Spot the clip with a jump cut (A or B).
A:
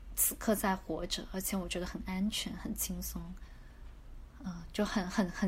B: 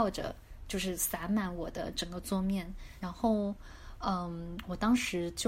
B